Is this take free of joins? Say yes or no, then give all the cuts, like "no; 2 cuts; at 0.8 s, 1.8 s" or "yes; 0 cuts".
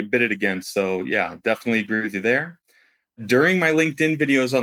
yes; 0 cuts